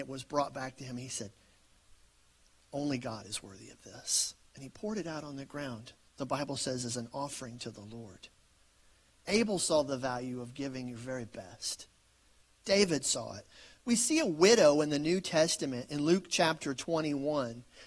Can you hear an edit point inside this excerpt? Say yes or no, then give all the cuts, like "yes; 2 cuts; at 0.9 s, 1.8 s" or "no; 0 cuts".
no; 0 cuts